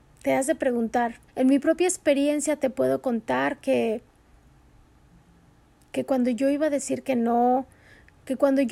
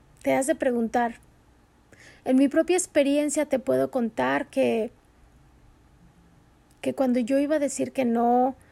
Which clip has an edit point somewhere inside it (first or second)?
first